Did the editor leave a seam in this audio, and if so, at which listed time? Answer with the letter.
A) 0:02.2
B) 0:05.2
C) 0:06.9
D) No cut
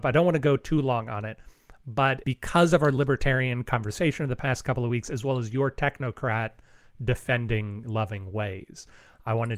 A